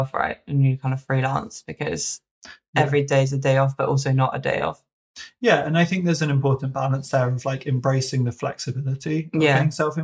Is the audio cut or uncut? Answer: uncut